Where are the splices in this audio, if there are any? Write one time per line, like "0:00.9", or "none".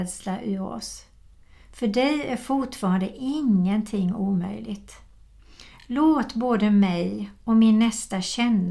none